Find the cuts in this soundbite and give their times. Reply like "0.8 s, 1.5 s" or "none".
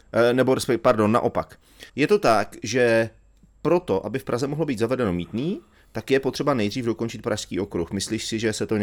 1.9 s